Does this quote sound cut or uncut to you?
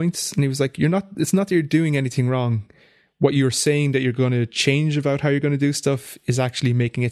uncut